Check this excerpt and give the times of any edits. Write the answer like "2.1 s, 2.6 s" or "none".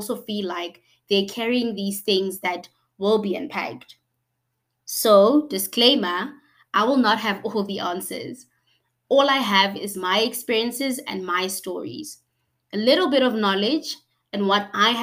none

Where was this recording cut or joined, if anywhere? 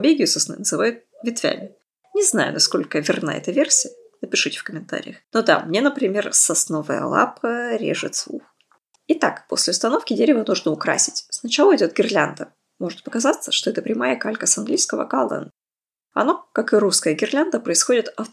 5.2 s

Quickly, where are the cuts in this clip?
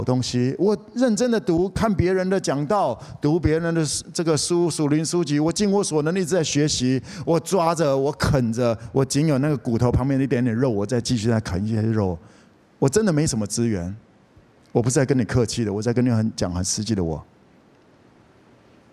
none

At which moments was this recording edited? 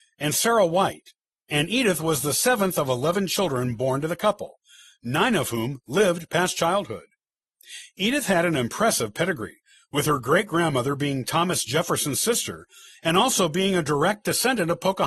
none

